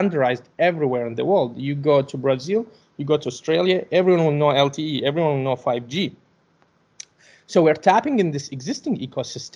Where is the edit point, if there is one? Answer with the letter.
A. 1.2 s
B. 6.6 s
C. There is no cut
C